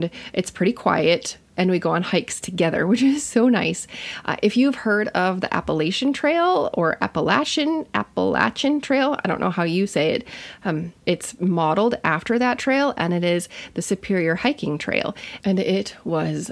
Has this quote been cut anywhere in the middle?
yes; 2 cuts; at 11.0 s, 15.4 s

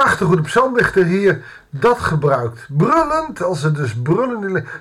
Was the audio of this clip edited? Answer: no; 0 cuts

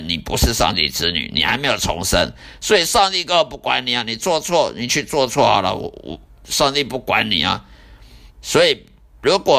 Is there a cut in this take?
yes; 1 cut; at 8.3 s

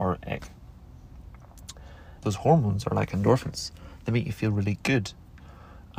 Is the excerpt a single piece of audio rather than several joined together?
no; 1 cut; at 2.2 s

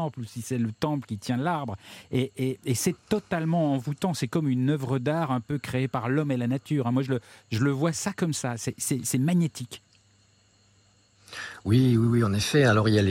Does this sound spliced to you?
no; 0 cuts

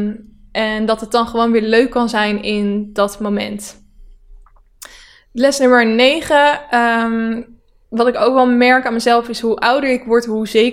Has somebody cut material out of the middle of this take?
no; 0 cuts

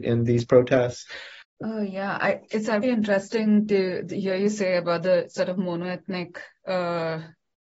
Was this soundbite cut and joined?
yes; 2 cuts; at 1.4 s, 2.8 s

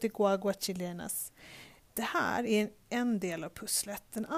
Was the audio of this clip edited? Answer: yes; 1 cut; at 1.9 s

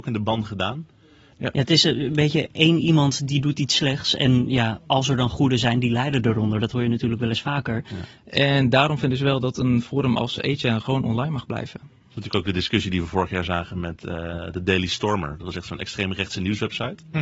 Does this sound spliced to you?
yes; 2 cuts; at 1.3 s, 8.2 s

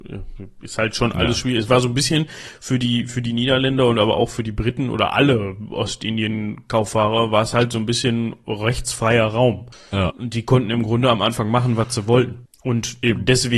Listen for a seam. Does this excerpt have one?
no; 0 cuts

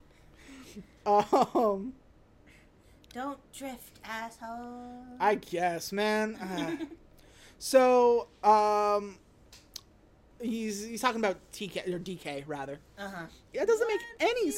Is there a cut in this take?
yes; 2 cuts; at 10.3 s, 13.5 s

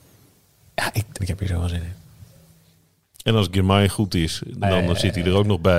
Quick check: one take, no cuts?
no; 2 cuts; at 1.2 s, 4.6 s

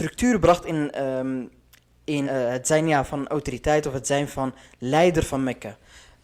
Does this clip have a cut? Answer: yes; 1 cut; at 2.2 s

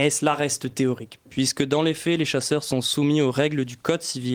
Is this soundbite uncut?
yes; 0 cuts

